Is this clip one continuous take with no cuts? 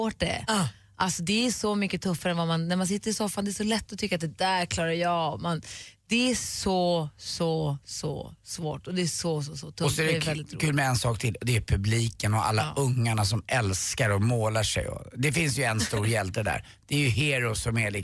yes; 0 cuts

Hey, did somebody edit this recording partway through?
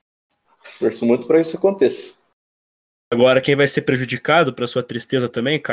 no; 0 cuts

